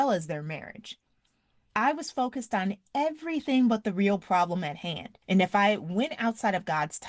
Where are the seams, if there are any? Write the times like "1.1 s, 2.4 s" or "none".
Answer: 1.7 s, 5.2 s